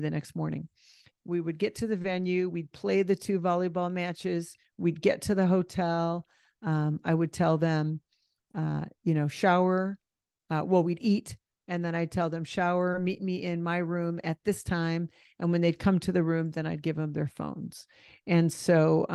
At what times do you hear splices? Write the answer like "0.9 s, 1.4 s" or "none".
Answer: 1.1 s